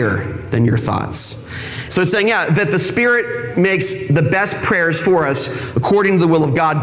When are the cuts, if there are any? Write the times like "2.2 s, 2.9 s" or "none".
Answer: 1.9 s